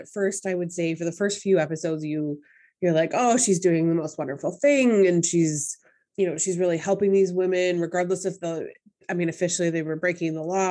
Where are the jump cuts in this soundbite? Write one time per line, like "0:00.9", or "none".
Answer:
0:06.1